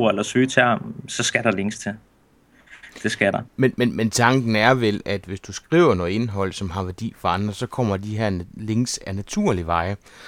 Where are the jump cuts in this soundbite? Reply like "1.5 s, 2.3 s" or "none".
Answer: none